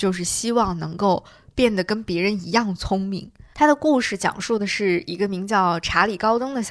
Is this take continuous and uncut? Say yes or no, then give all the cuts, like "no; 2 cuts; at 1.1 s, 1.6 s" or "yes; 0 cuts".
no; 1 cut; at 3.5 s